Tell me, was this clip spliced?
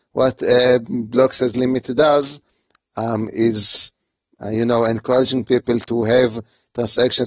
no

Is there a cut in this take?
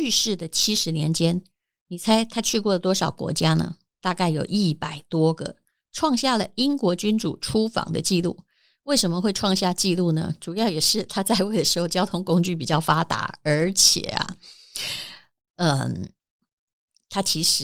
no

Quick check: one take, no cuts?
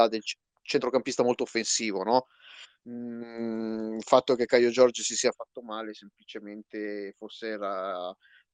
no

